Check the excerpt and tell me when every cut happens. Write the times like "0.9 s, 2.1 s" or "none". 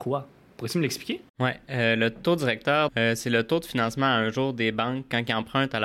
1.3 s, 2.9 s